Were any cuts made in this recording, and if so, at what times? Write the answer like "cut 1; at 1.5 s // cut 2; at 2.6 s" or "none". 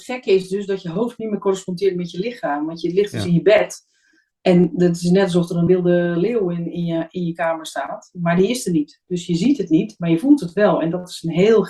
cut 1; at 5.7 s